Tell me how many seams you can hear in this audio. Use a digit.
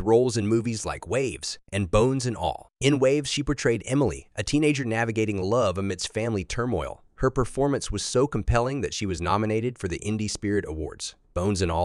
0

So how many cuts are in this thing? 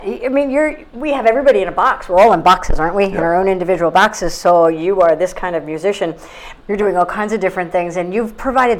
1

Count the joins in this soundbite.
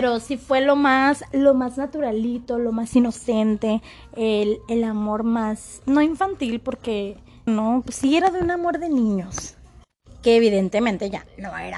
1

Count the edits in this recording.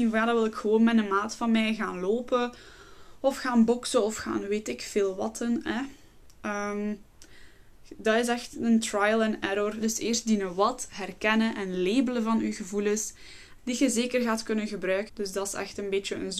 3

